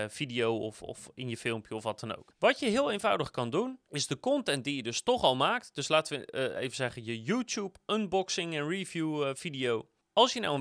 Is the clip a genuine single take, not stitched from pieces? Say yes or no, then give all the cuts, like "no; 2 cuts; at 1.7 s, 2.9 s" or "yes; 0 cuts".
yes; 0 cuts